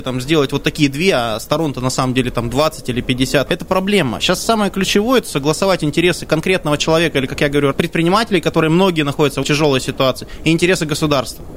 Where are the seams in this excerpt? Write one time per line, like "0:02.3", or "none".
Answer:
0:03.5
0:07.7
0:09.4